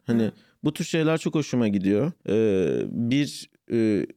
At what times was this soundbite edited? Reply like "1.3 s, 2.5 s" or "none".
2.2 s